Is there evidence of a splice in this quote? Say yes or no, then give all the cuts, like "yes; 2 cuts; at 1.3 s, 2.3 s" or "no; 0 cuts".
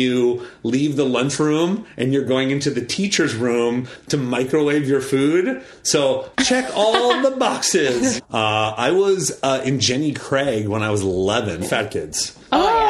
yes; 3 cuts; at 6.3 s, 8.2 s, 11.6 s